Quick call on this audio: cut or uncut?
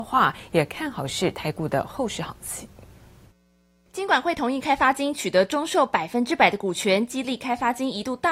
uncut